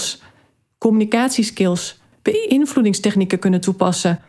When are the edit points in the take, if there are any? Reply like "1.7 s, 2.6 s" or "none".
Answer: 2.1 s